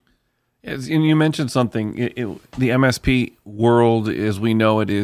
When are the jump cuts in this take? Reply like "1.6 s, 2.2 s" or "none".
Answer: none